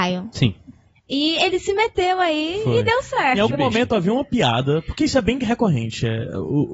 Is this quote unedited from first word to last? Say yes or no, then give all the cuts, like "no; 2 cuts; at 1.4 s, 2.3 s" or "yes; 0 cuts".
yes; 0 cuts